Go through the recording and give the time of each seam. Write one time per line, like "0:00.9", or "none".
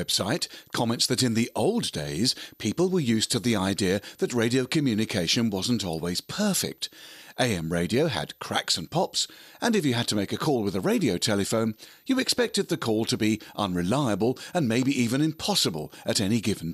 none